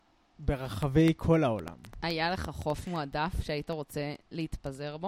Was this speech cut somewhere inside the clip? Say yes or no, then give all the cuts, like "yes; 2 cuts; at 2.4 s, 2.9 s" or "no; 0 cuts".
no; 0 cuts